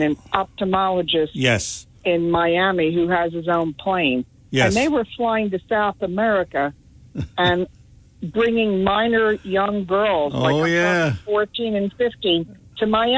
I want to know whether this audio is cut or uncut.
uncut